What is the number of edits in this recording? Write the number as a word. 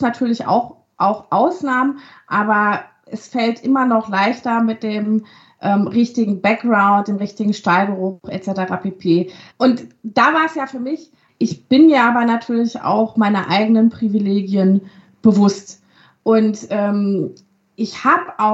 two